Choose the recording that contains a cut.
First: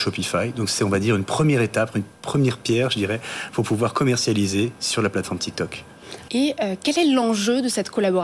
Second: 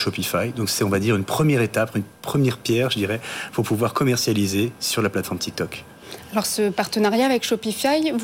first; 1 cut; at 6.3 s

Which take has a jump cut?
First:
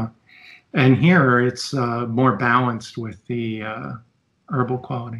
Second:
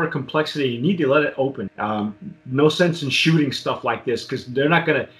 second; 1 cut; at 1.7 s

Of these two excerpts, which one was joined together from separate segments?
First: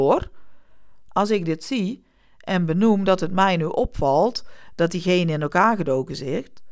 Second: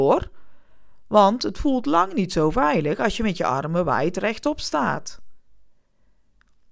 first; 1 cut; at 1.1 s

